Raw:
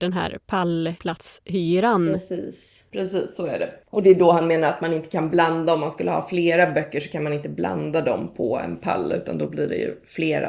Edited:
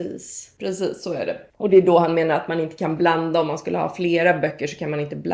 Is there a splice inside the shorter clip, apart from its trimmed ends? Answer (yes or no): no